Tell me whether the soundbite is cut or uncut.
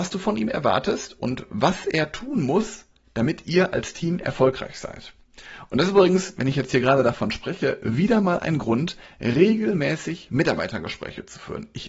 uncut